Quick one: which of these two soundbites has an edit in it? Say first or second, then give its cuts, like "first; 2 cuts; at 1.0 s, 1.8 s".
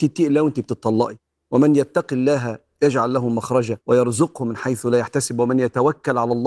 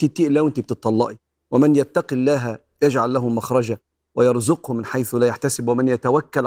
first; 1 cut; at 3.8 s